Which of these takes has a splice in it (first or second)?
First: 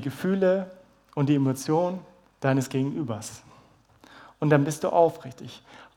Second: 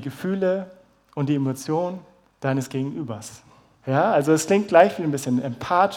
second